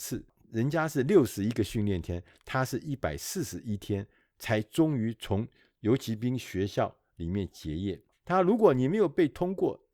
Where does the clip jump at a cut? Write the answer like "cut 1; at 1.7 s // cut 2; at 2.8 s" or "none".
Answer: cut 1; at 8.1 s